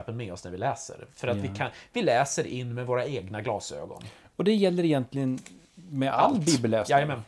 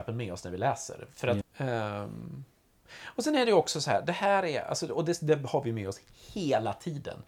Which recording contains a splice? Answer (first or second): second